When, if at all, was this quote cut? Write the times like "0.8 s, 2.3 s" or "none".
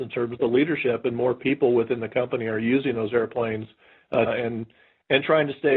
4.3 s